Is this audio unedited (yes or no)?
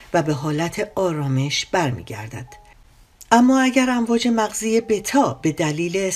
yes